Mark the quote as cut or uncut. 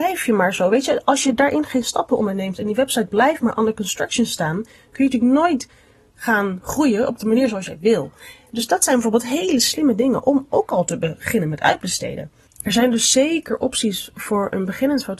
uncut